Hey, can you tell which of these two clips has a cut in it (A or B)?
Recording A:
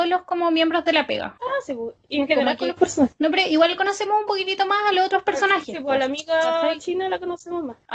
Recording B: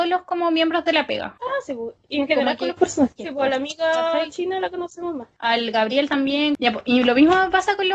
B